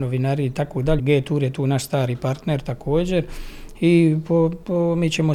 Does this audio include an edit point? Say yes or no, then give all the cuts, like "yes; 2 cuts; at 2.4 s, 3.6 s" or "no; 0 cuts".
yes; 1 cut; at 1.0 s